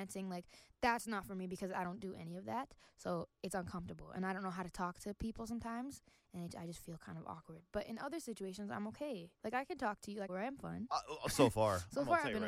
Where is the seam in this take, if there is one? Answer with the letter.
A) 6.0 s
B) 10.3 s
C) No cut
B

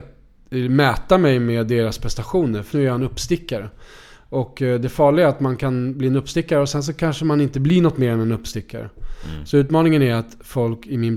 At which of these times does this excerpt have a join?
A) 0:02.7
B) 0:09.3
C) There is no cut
A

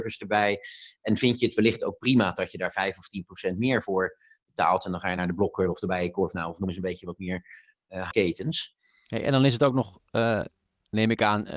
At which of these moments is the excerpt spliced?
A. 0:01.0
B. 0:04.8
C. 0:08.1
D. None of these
C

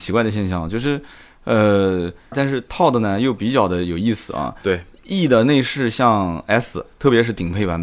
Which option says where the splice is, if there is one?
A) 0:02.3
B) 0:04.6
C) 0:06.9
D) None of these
A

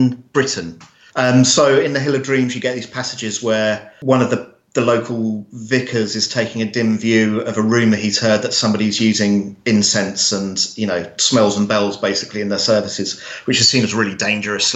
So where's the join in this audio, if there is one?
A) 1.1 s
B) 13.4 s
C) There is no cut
A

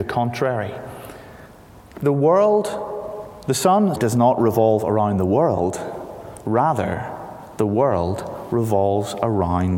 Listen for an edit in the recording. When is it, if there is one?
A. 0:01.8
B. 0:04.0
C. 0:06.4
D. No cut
B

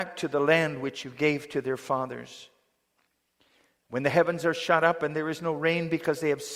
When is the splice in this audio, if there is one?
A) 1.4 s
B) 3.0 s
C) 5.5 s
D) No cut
D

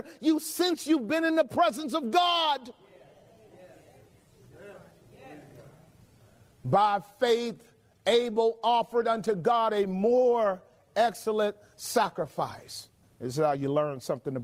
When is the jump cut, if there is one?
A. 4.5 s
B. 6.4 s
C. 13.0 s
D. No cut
C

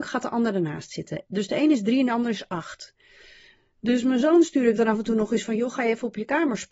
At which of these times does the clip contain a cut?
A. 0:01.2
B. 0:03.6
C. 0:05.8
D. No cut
A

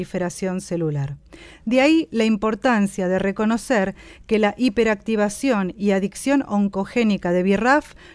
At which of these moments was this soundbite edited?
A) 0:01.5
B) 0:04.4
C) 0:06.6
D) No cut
D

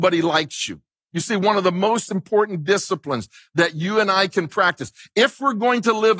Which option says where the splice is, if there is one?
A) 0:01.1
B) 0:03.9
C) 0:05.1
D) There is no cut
A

